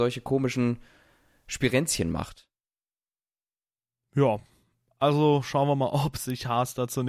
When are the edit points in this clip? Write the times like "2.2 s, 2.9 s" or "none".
none